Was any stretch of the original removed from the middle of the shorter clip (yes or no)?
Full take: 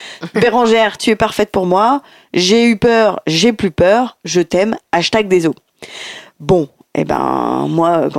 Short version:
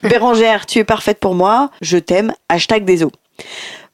yes